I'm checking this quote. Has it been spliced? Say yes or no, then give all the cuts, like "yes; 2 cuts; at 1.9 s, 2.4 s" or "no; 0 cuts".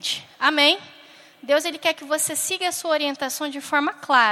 no; 0 cuts